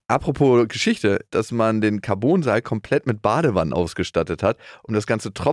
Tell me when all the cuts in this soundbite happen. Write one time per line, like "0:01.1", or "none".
0:01.3